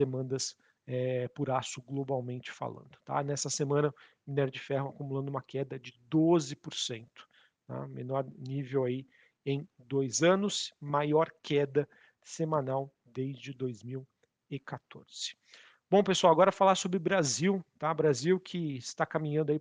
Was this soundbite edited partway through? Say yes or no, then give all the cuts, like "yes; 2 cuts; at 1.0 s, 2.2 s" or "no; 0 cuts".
no; 0 cuts